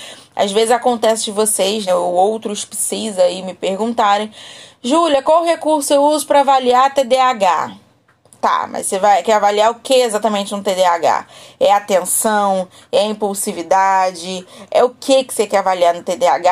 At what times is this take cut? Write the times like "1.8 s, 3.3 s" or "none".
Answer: 1.9 s